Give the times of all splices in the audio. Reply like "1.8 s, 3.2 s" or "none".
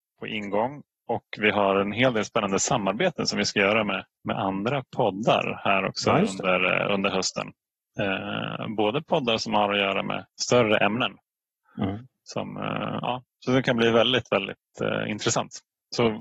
10.3 s